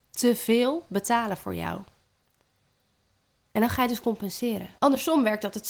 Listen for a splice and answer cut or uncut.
cut